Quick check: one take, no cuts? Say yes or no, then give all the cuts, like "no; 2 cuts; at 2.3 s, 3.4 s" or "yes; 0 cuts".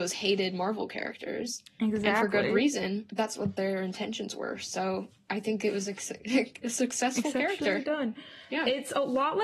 yes; 0 cuts